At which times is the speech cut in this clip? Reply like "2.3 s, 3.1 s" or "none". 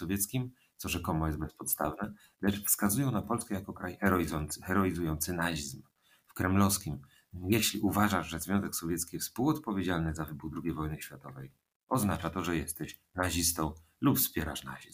7.3 s